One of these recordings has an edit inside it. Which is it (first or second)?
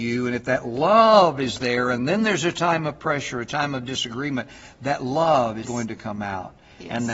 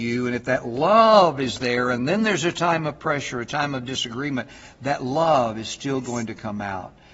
first